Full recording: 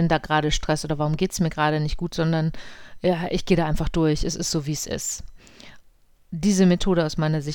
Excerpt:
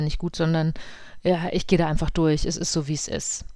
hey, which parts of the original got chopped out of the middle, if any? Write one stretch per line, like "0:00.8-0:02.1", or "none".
none